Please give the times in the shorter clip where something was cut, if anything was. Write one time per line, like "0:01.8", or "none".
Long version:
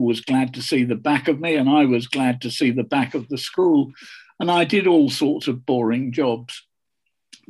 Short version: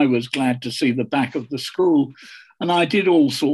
none